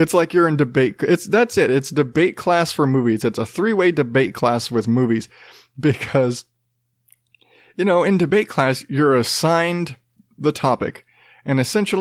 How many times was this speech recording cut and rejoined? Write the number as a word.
zero